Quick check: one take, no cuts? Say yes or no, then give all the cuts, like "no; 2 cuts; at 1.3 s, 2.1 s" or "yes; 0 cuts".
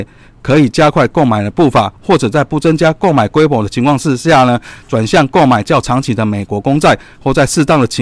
yes; 0 cuts